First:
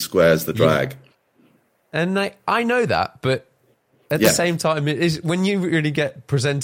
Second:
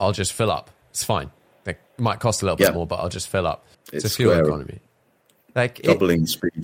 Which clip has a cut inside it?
second; 2 cuts; at 1.9 s, 3.7 s

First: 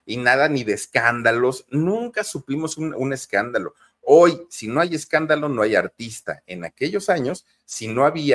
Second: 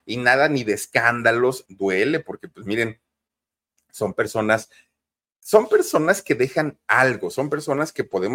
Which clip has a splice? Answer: second; 1 cut; at 1.7 s

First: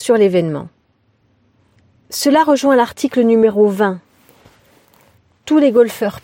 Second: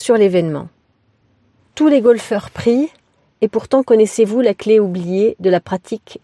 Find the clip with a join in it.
second; 1 cut; at 1.7 s

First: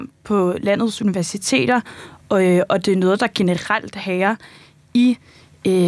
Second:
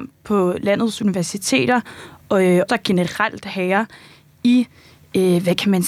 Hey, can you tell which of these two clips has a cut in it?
second; 1 cut; at 2.7 s

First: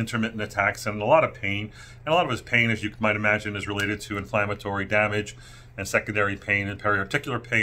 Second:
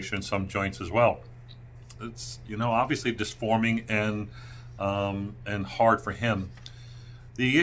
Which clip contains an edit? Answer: second; 1 cut; at 1.9 s

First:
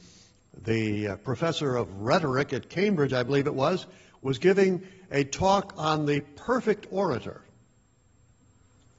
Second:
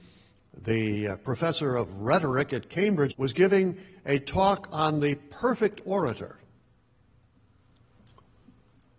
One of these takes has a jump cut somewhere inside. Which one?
second; 1 cut; at 3.1 s

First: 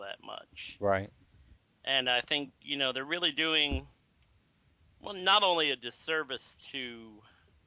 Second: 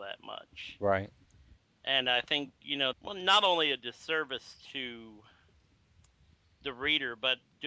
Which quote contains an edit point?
second; 1 cut; at 2.9 s

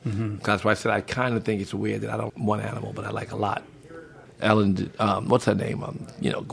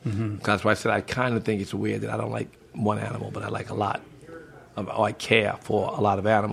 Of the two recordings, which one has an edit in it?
first; 2 cuts; at 2.3 s, 4.3 s

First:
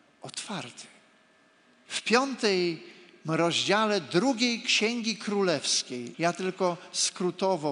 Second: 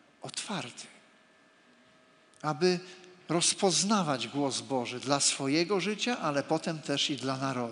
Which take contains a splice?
first; 2 cuts; at 1.9 s, 6.1 s

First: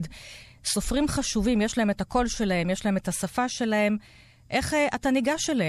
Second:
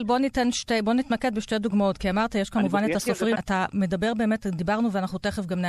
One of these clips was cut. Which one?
second; 1 cut; at 3.4 s

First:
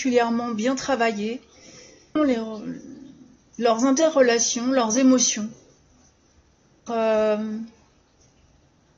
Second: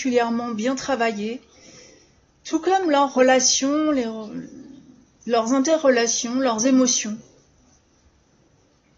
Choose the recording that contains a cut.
first; 2 cuts; at 2.2 s, 6.9 s

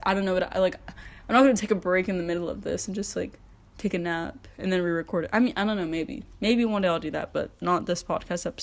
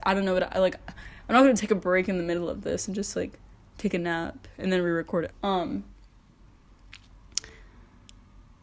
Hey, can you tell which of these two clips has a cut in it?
second; 1 cut; at 5.3 s

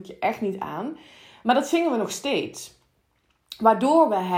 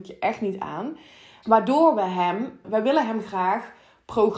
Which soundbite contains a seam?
second; 2 cuts; at 1.4 s, 2.6 s

